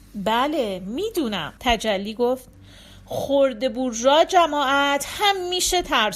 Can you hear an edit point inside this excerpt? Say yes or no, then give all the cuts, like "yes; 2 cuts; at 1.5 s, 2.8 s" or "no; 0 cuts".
yes; 1 cut; at 1.6 s